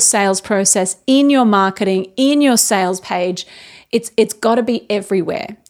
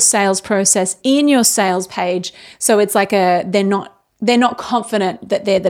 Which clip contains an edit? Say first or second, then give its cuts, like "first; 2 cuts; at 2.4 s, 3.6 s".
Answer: second; 3 cuts; at 1.0 s, 2.5 s, 4.1 s